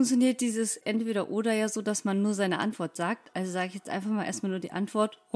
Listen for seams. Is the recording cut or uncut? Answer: uncut